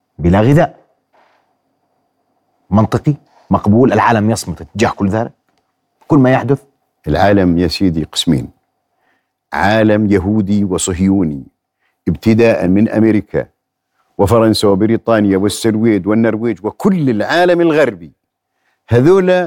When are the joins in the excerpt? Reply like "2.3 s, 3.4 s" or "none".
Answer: none